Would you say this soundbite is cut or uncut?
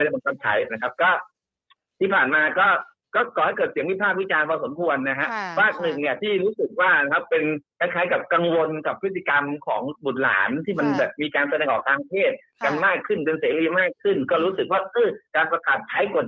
uncut